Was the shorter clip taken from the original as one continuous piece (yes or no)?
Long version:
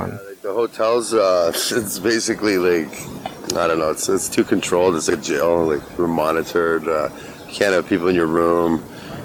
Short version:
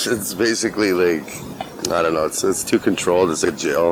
yes